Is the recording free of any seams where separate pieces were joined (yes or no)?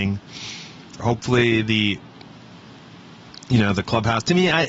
no